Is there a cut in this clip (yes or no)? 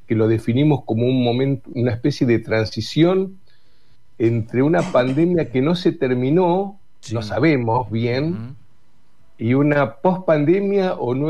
no